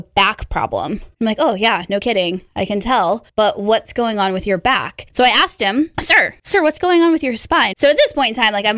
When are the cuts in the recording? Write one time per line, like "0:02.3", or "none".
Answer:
0:01.1
0:05.1
0:07.7